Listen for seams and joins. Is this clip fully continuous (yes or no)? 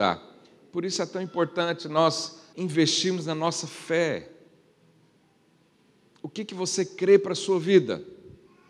no